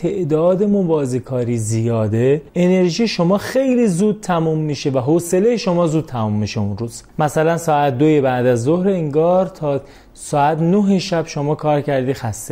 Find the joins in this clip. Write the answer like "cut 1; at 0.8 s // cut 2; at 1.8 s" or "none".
cut 1; at 2.5 s // cut 2; at 7.1 s